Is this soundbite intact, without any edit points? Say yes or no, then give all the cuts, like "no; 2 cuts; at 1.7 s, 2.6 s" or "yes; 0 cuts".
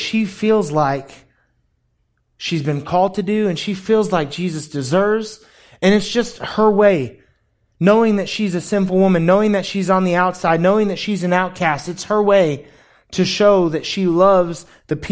yes; 0 cuts